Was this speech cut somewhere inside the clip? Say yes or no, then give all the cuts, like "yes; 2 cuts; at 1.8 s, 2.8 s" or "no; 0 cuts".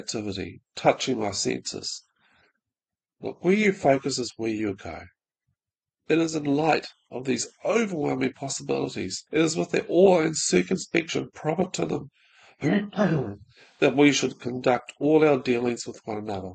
yes; 2 cuts; at 5.9 s, 9.3 s